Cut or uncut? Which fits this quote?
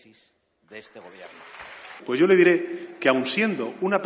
cut